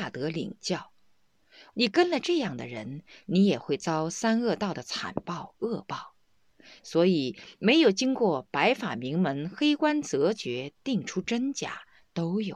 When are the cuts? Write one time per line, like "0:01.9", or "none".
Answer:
0:01.7
0:03.2